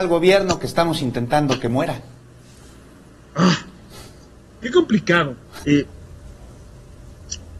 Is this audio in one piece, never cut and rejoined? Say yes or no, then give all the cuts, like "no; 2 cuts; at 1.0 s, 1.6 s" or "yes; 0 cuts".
no; 1 cut; at 5.6 s